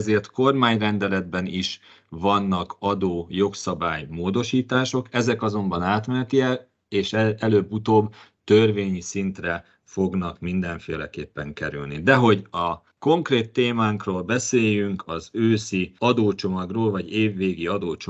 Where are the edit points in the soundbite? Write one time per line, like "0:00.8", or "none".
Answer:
0:12.9